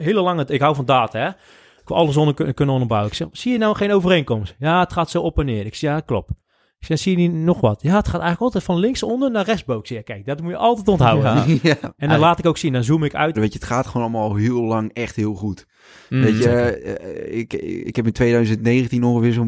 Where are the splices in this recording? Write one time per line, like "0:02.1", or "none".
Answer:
0:11.8
0:13.4